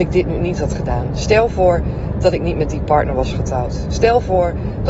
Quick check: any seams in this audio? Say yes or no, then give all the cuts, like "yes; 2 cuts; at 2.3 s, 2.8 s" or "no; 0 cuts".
no; 0 cuts